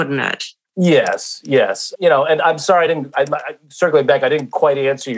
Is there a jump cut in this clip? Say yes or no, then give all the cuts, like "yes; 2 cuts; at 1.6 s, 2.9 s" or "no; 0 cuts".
no; 0 cuts